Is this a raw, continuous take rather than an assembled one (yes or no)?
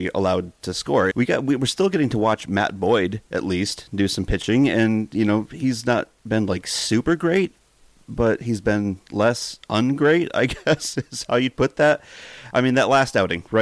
no